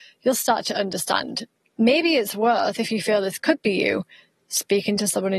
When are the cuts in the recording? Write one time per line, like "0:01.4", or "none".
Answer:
none